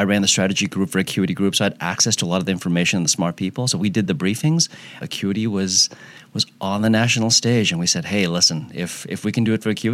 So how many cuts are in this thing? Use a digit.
1